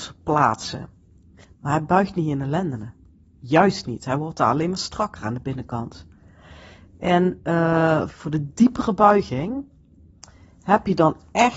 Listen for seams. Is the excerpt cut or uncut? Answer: cut